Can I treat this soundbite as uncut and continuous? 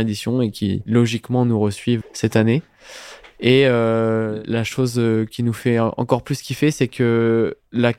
no; 1 cut; at 2.0 s

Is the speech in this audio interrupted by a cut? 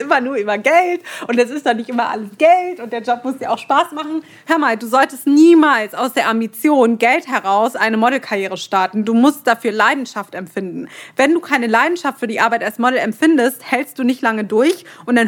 no; 0 cuts

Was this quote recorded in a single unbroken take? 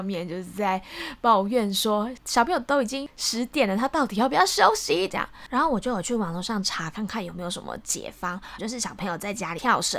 no; 2 cuts; at 5.1 s, 8.6 s

